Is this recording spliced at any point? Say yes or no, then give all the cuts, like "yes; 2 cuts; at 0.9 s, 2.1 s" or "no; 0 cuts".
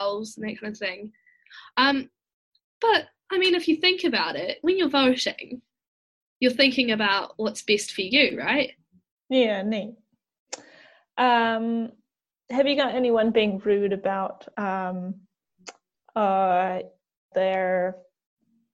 yes; 2 cuts; at 9.2 s, 17.3 s